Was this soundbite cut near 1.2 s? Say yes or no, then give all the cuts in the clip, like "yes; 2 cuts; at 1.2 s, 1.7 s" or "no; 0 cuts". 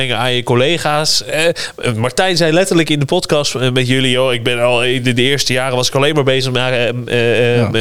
no; 0 cuts